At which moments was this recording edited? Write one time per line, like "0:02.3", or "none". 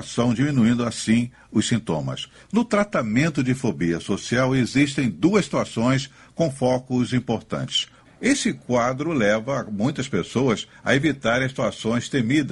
0:02.4
0:08.0